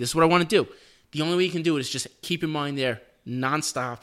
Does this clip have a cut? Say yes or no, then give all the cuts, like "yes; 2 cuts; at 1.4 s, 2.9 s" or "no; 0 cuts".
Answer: no; 0 cuts